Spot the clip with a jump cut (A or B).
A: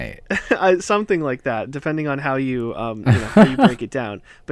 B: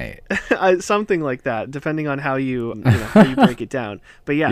B